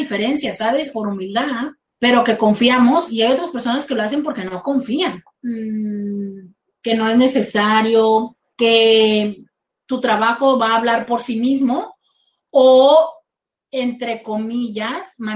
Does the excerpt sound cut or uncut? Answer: cut